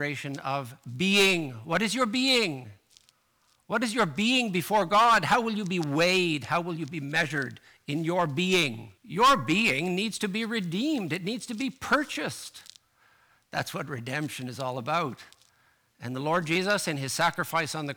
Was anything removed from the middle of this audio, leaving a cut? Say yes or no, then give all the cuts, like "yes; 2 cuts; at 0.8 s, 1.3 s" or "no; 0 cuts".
yes; 2 cuts; at 9.0 s, 15.9 s